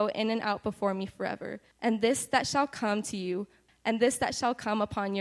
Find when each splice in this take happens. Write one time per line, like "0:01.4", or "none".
0:01.7
0:03.7